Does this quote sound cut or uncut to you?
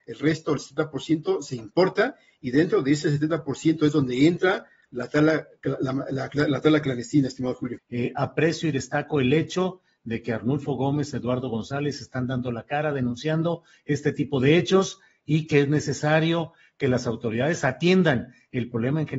cut